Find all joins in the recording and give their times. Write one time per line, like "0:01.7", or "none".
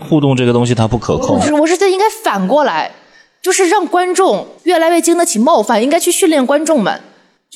none